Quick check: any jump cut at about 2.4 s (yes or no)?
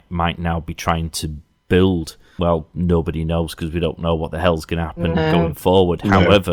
yes